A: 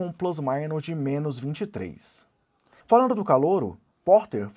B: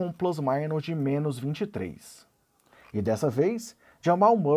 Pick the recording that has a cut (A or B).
A